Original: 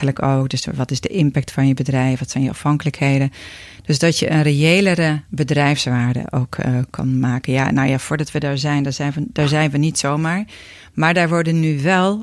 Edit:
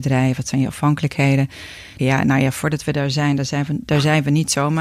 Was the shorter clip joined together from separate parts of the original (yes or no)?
yes